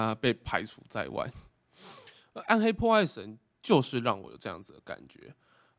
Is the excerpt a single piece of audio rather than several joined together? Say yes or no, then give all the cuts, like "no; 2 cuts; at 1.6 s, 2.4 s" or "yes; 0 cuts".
yes; 0 cuts